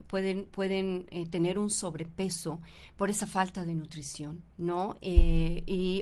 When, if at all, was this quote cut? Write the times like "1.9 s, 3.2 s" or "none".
4.5 s